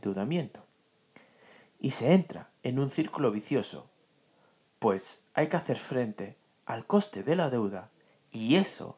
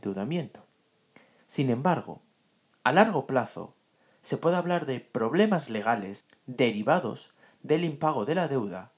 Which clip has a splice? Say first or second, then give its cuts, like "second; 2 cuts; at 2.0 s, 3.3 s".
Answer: second; 1 cut; at 1.4 s